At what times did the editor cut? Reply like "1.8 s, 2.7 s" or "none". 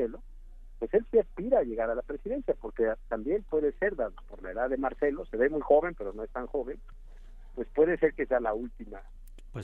none